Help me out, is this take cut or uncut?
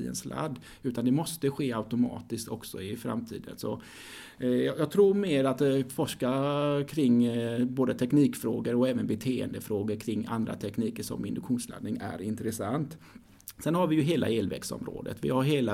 uncut